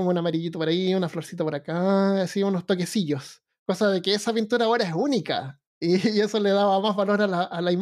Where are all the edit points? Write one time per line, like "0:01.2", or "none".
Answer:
0:05.7